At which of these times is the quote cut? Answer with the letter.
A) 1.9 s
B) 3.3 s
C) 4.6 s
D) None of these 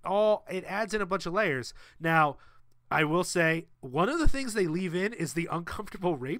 D